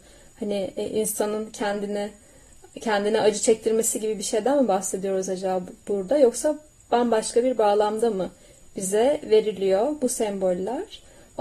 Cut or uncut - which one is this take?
uncut